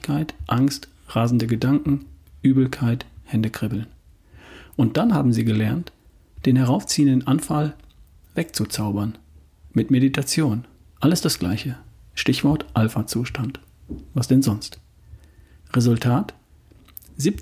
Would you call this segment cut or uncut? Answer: cut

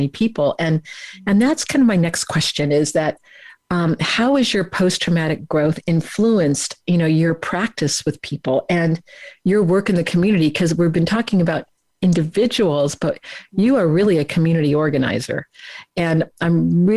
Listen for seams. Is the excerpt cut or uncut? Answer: uncut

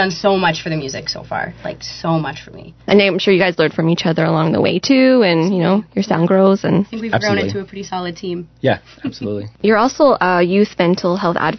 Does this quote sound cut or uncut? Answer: uncut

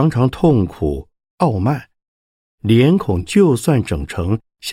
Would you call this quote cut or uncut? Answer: cut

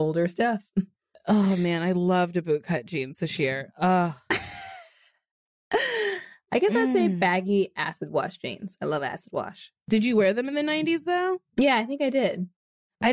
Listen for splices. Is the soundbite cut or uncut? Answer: cut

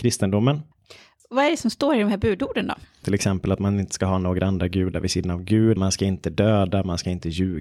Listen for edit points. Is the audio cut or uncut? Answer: cut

